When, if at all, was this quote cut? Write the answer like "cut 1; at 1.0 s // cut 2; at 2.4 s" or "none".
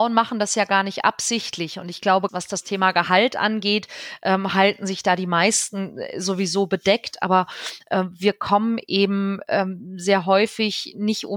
cut 1; at 2.3 s